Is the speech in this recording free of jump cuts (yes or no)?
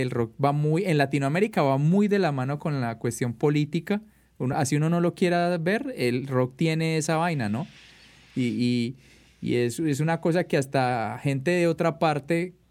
yes